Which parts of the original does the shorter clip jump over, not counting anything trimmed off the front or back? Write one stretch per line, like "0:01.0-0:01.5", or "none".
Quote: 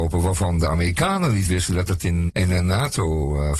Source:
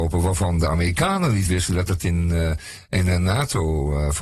0:02.3-0:02.8